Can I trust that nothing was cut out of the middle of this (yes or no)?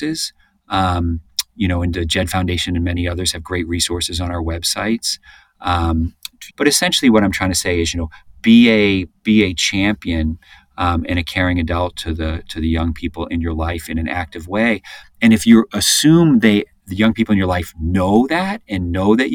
no